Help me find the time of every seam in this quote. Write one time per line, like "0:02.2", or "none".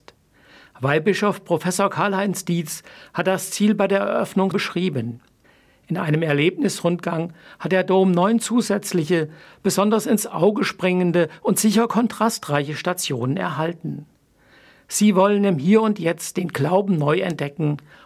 0:04.5

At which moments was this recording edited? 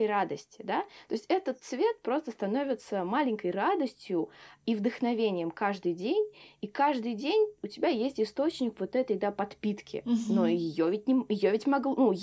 none

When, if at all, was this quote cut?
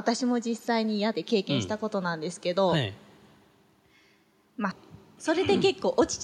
0:01.1
0:04.7

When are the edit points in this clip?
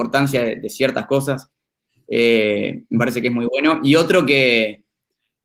none

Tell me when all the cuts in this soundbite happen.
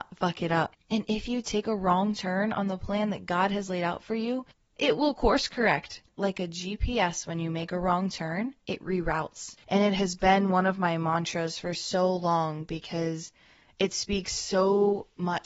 0:09.6

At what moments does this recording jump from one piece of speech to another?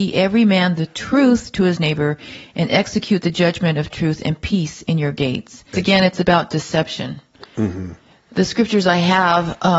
0:05.7

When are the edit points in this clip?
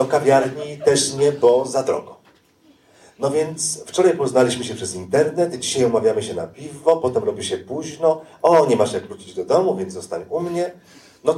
none

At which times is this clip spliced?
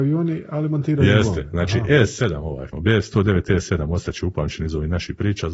0:02.7

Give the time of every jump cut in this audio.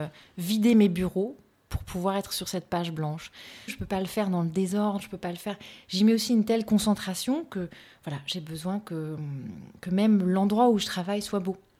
0:03.7

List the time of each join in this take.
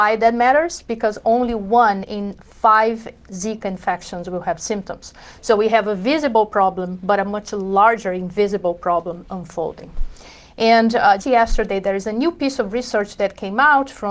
0:11.2

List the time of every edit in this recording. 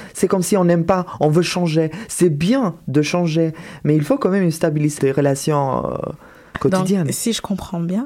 0:05.0

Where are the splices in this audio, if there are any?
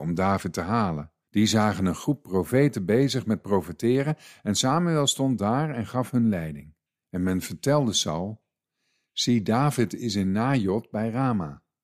0:01.3
0:07.0

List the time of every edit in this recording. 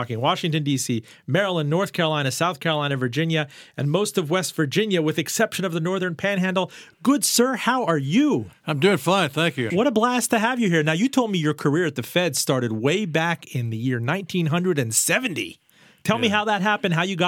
0:09.7

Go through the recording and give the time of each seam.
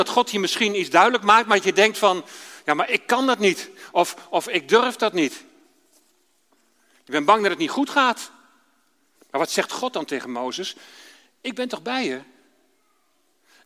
0:09.2

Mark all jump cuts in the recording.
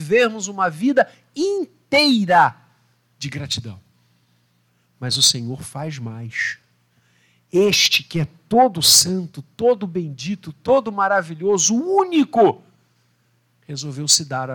none

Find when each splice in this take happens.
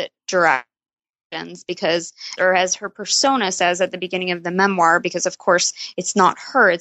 0:02.4

